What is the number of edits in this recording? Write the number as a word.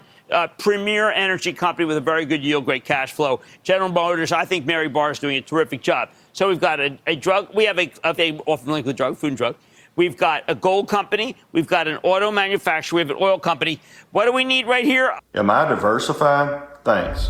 two